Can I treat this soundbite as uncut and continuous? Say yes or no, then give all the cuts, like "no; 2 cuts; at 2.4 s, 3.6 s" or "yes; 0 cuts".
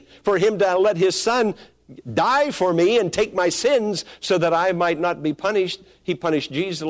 yes; 0 cuts